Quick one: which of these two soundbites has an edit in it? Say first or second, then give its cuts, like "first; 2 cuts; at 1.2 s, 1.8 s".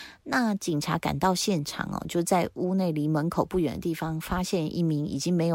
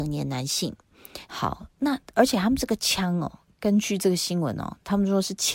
second; 1 cut; at 1.3 s